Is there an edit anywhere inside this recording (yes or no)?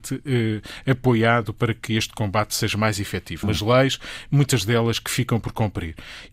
yes